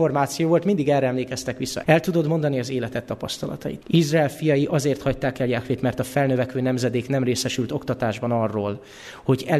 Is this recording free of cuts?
no; 2 cuts; at 1.8 s, 3.8 s

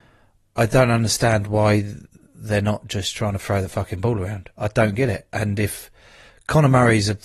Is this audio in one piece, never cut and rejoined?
yes; 0 cuts

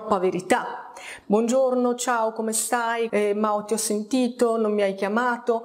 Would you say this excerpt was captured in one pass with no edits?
no; 2 cuts; at 1.2 s, 3.1 s

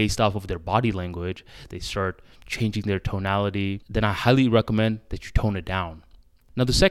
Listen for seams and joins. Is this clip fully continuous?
no; 2 cuts; at 1.7 s, 3.8 s

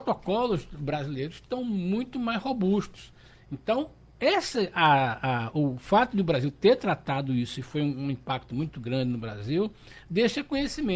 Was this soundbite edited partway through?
no; 0 cuts

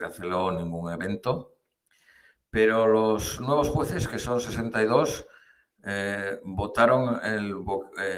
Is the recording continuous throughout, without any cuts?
yes; 0 cuts

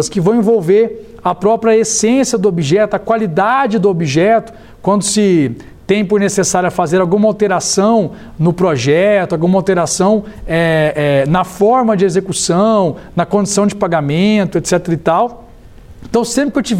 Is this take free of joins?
yes; 0 cuts

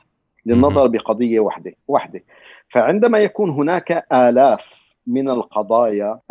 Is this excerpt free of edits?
no; 2 cuts; at 1.8 s, 5.0 s

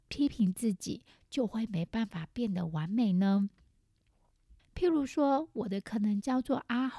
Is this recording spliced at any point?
yes; 1 cut; at 4.6 s

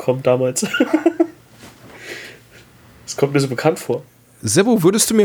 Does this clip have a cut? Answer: no; 0 cuts

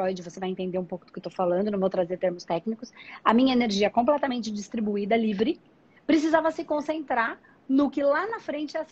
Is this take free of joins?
yes; 0 cuts

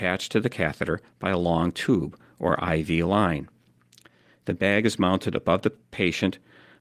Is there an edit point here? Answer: no; 0 cuts

